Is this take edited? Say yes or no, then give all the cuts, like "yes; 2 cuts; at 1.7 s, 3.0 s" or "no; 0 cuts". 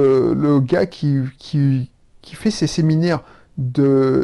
no; 0 cuts